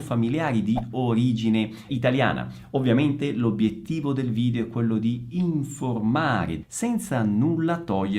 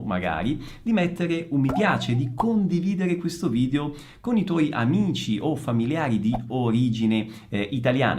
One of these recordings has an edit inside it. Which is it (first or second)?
first